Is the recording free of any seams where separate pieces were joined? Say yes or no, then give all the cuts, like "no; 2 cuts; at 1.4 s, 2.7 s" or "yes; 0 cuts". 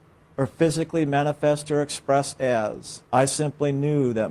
no; 1 cut; at 3.1 s